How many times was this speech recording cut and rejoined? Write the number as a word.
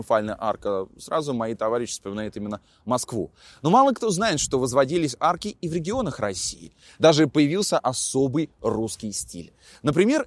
zero